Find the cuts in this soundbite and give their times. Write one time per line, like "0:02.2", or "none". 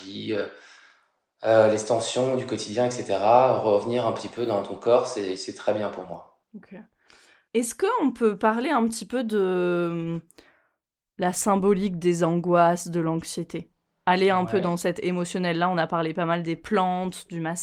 none